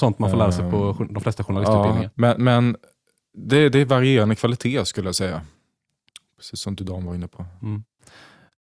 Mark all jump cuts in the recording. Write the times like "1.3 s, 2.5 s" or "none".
2.1 s